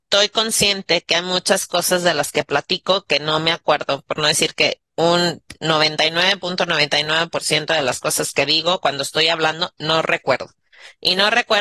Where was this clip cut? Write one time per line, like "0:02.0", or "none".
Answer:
0:04.9